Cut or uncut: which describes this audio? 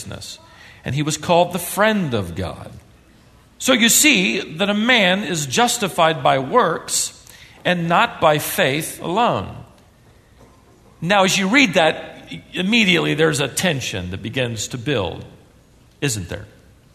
uncut